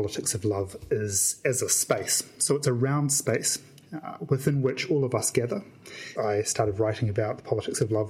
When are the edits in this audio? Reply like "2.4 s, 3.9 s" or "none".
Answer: 6.2 s